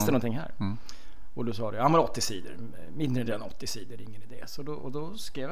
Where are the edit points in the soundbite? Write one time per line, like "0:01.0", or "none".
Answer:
0:03.3